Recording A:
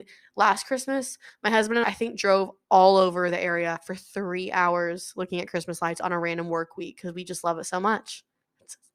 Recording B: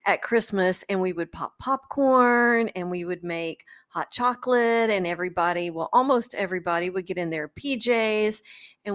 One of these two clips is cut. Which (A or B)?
A